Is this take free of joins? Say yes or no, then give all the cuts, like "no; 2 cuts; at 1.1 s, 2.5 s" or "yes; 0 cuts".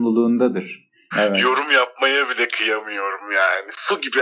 no; 1 cut; at 1.1 s